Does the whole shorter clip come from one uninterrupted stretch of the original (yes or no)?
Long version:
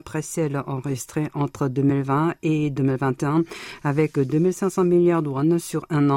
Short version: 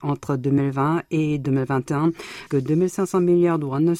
no